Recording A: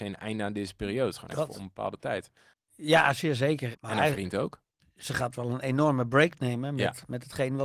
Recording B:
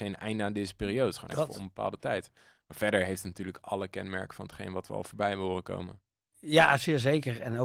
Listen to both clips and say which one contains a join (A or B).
A